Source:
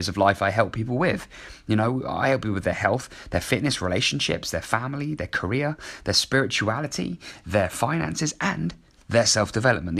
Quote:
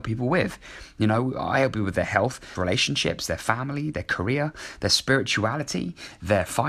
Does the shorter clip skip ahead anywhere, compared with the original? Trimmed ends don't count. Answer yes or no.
yes